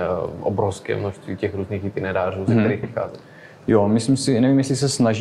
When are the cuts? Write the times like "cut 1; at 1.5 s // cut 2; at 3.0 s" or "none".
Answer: cut 1; at 2.8 s